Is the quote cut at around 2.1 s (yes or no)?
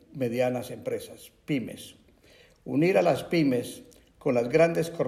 no